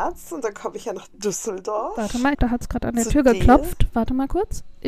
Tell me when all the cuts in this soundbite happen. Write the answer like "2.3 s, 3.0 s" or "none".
2.3 s